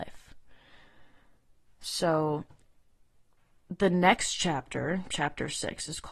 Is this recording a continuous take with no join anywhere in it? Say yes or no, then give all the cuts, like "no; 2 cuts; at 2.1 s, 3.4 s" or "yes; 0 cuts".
yes; 0 cuts